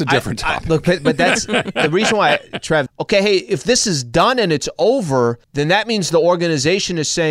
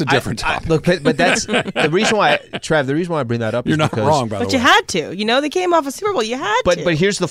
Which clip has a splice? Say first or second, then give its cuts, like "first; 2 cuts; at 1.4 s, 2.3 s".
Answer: first; 2 cuts; at 2.9 s, 5.4 s